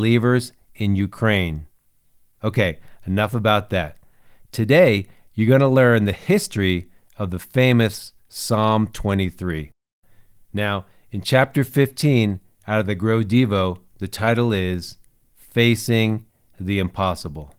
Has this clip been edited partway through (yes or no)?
no